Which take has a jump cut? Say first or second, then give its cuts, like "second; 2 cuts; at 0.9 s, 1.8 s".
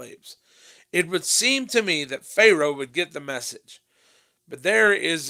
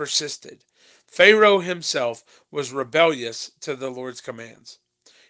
second; 1 cut; at 1.0 s